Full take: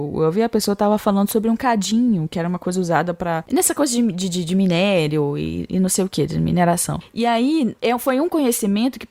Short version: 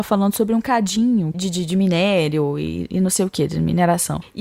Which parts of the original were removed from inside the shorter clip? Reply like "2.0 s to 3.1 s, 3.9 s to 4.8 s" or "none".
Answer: 2.3 s to 4.1 s